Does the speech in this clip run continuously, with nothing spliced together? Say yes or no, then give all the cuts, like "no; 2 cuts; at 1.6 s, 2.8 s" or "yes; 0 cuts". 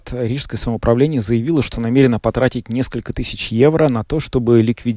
yes; 0 cuts